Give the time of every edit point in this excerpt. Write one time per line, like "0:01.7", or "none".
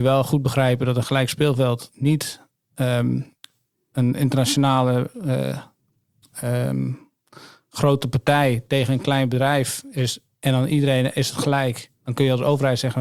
none